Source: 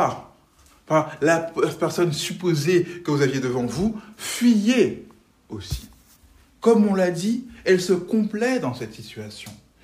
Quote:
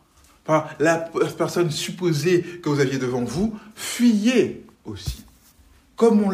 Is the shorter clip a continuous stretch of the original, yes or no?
no